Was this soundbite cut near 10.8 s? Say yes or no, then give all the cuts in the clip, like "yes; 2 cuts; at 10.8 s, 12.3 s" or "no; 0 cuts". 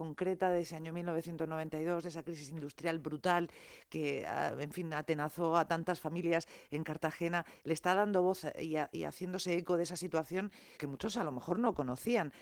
yes; 1 cut; at 10.8 s